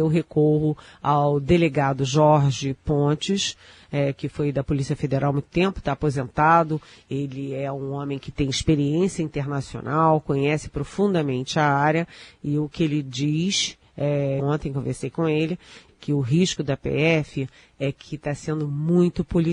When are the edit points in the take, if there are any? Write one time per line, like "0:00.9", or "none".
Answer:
0:14.4
0:15.9